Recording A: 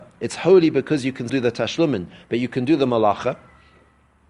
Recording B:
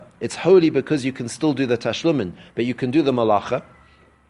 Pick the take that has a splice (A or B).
A